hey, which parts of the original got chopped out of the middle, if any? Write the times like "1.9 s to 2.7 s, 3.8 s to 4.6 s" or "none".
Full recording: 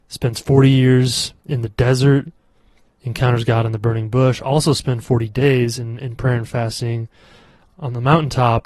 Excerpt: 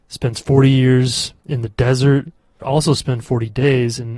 2.6 s to 4.4 s